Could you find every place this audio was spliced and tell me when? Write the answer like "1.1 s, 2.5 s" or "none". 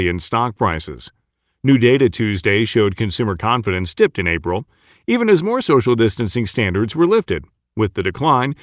none